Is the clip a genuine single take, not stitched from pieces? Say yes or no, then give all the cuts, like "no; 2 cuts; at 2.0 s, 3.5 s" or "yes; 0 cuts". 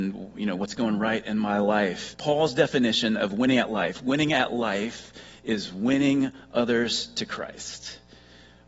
no; 1 cut; at 2.1 s